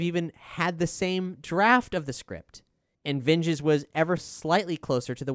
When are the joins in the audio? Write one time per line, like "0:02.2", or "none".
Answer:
0:02.9
0:04.2